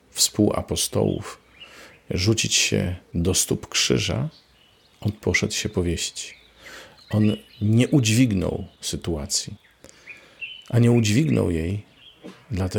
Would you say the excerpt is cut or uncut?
uncut